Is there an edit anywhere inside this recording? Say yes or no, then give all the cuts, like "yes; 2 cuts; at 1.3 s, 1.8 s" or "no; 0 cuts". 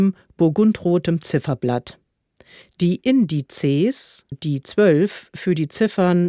yes; 2 cuts; at 2.6 s, 4.3 s